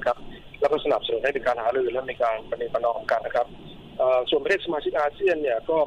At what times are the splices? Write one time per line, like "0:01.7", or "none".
0:03.2